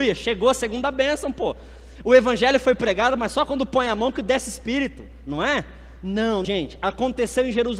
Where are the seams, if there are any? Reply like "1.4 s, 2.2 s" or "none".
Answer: 6.4 s